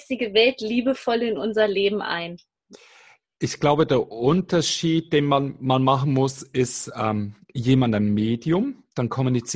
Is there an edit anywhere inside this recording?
no; 0 cuts

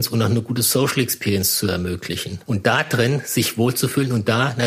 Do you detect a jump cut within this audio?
yes; 1 cut; at 2.4 s

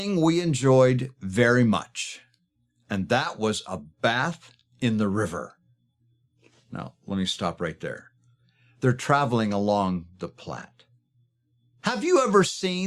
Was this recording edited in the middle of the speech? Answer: no; 0 cuts

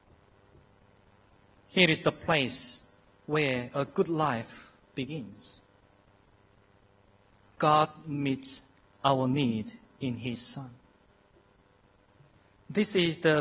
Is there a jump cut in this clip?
no; 0 cuts

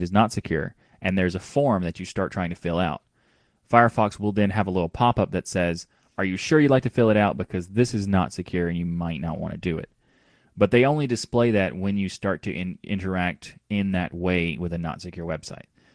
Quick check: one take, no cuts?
yes; 0 cuts

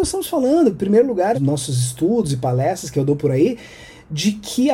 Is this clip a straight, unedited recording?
no; 1 cut; at 1.3 s

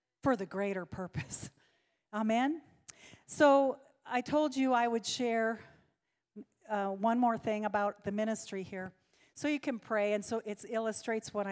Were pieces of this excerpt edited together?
no; 0 cuts

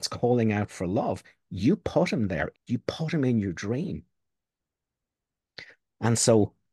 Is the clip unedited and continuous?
no; 1 cut; at 2.5 s

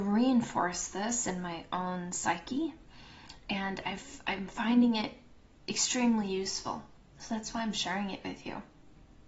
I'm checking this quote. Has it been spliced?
no; 0 cuts

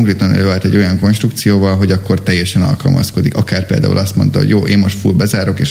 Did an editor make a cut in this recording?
no; 0 cuts

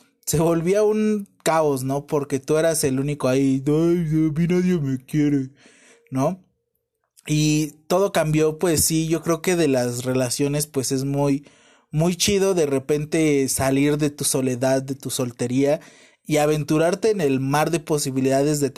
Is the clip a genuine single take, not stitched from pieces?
yes; 0 cuts

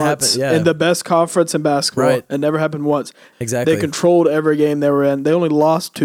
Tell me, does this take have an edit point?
yes; 1 cut; at 3.3 s

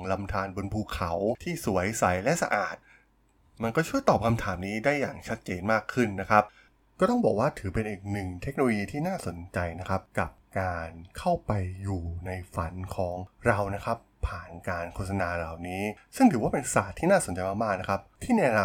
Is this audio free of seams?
yes; 0 cuts

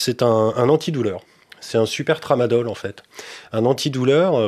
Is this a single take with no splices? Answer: yes; 0 cuts

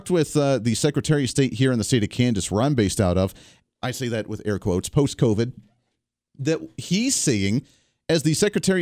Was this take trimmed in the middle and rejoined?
yes; 1 cut; at 3.6 s

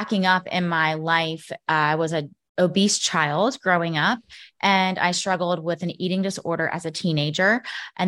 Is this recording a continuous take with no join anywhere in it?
yes; 0 cuts

